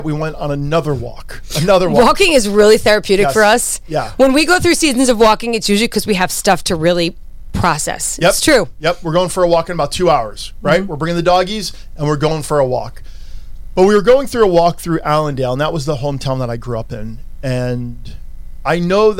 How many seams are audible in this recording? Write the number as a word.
zero